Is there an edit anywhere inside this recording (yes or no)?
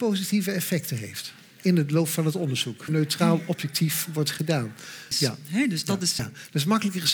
yes